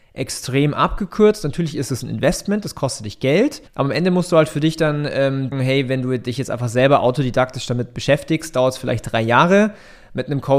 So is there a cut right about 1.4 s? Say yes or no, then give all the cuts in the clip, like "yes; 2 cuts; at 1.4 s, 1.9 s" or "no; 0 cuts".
no; 2 cuts; at 3.7 s, 5.5 s